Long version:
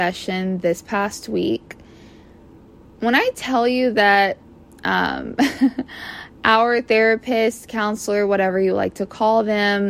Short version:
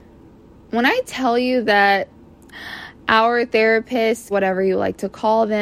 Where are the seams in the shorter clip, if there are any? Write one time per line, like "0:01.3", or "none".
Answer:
0:02.5
0:04.3